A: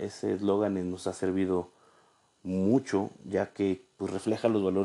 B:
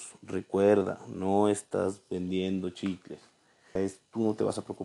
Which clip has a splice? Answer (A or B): B